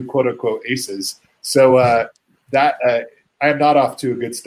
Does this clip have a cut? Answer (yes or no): no